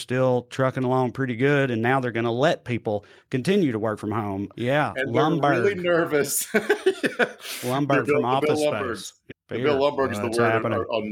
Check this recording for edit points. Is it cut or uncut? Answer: cut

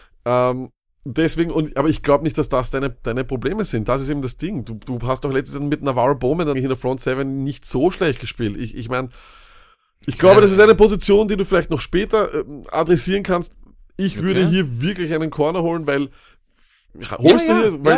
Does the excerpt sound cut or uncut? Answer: cut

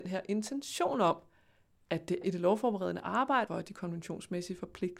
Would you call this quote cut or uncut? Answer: cut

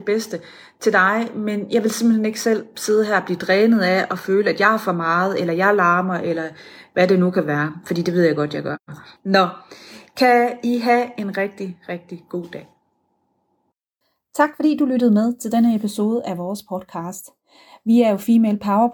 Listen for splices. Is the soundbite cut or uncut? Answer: cut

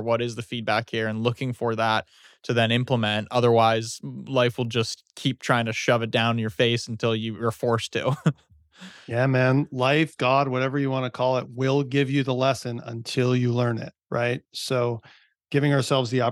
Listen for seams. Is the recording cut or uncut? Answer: cut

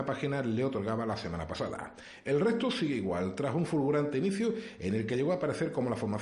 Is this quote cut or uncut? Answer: uncut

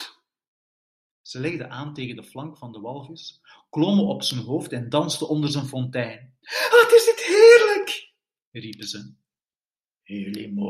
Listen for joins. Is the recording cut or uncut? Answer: uncut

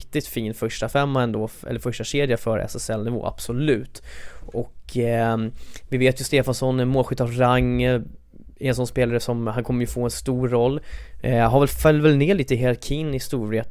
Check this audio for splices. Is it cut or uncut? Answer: uncut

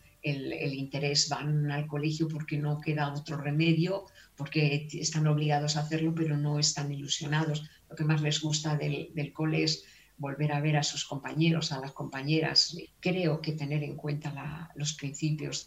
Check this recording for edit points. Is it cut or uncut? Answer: cut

